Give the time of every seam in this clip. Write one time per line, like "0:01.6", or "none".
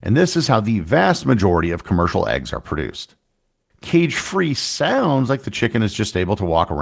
0:03.7